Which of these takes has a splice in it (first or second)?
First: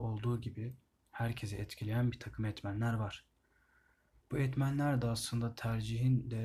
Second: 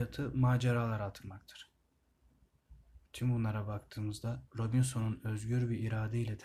second